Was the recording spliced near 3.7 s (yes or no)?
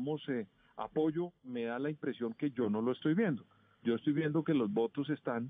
no